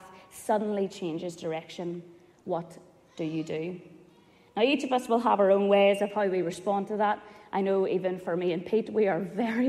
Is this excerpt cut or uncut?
uncut